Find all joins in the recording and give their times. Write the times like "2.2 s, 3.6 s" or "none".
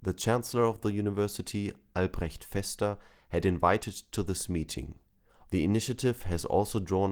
5.5 s